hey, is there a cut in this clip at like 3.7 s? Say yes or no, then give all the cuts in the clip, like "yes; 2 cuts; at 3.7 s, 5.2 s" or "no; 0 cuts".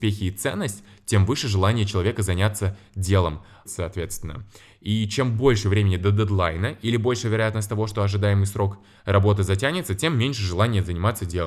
yes; 1 cut; at 3.7 s